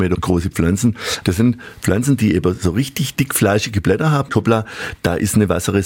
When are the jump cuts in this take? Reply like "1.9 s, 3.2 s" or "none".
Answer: 1.2 s, 4.3 s